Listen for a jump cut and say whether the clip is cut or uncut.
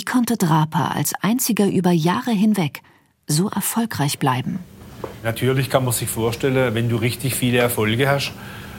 uncut